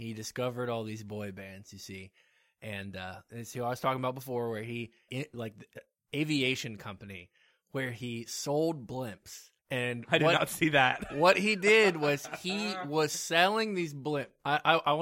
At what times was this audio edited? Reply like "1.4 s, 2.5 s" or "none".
5.1 s, 9.6 s